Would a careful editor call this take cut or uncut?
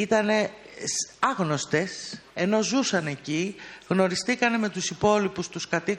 cut